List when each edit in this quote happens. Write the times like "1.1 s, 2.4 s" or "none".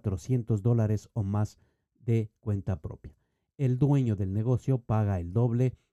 none